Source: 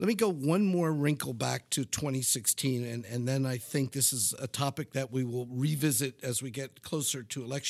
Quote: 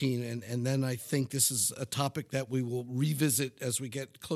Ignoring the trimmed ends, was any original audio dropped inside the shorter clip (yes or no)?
no